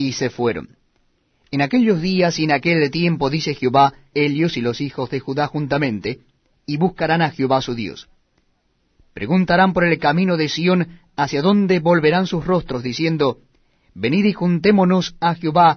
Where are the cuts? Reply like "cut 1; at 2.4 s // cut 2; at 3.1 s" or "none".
cut 1; at 4.1 s // cut 2; at 6.5 s